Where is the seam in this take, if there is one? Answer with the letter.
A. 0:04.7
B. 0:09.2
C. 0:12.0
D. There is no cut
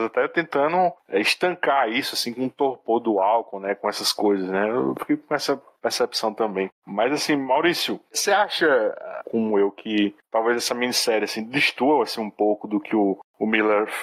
B